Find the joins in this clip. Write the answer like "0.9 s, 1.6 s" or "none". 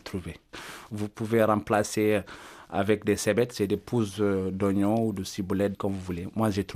5.7 s